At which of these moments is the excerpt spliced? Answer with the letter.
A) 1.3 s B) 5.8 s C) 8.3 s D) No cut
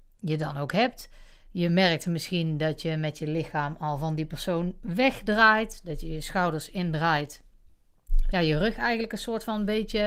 C